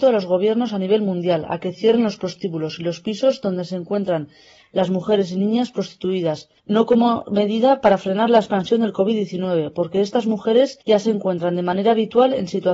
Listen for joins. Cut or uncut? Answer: cut